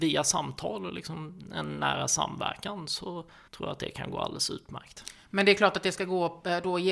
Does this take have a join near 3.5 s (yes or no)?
yes